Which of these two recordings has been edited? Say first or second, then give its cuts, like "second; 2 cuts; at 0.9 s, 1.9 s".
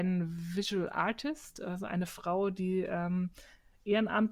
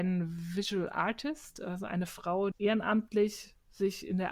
second; 1 cut; at 2.5 s